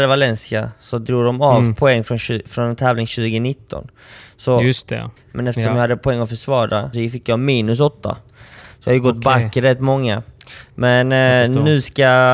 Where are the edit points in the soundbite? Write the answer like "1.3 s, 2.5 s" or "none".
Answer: 5.2 s, 6.9 s